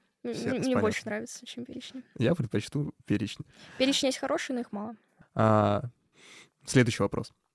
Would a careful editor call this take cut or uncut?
cut